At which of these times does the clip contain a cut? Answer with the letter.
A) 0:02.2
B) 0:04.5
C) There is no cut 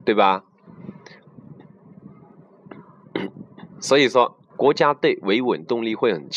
B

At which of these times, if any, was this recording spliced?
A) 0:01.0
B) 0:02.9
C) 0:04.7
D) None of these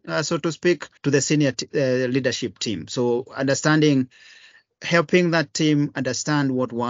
A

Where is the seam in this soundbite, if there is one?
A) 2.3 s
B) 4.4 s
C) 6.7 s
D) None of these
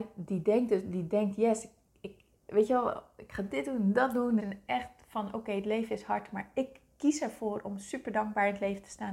B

